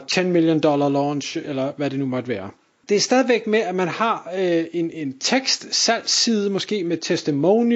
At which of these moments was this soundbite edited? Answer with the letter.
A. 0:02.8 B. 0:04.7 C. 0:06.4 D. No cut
A